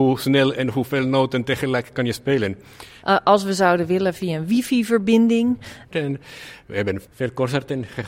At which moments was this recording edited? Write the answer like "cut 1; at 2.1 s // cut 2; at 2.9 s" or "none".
cut 1; at 3.0 s // cut 2; at 5.9 s